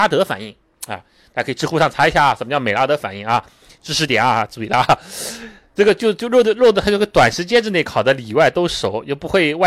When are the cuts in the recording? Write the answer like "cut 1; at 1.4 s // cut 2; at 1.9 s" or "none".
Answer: none